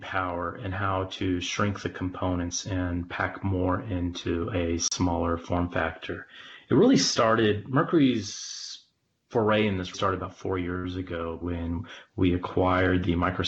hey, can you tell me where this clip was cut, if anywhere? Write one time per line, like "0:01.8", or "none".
0:09.9
0:11.4